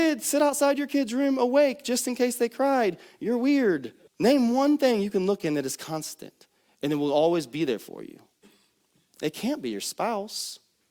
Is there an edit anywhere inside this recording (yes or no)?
yes